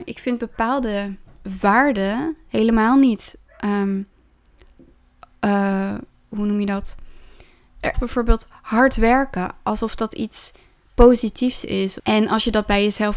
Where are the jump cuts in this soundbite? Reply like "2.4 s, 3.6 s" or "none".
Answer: 7.9 s, 12.0 s